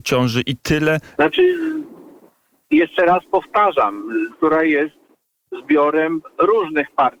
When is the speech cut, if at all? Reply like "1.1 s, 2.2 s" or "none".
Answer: 1.2 s, 4.3 s